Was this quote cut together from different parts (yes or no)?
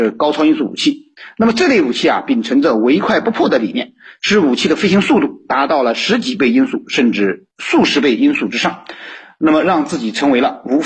yes